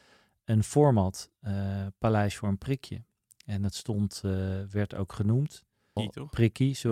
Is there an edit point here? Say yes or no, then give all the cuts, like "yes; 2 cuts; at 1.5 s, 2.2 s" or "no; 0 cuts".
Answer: yes; 1 cut; at 6.0 s